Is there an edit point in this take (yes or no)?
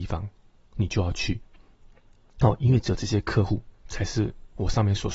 no